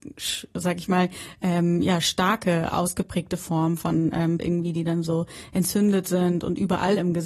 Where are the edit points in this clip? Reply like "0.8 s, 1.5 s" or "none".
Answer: 4.4 s